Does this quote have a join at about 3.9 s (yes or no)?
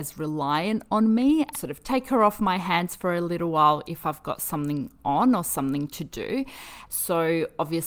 no